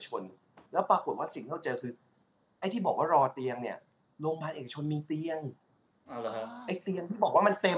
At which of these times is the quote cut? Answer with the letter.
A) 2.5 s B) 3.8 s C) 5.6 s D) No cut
D